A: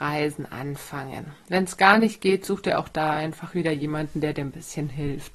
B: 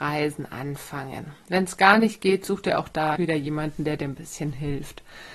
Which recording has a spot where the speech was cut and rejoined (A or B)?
B